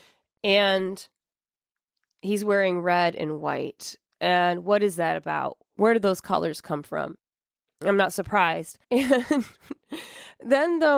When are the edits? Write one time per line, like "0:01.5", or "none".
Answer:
0:07.7
0:08.8